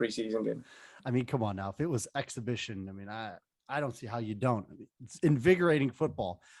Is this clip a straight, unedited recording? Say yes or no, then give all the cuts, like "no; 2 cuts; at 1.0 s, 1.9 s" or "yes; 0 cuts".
yes; 0 cuts